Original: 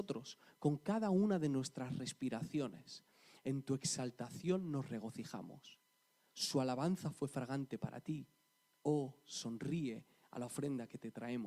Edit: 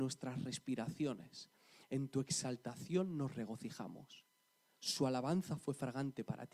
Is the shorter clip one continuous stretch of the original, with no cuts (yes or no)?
yes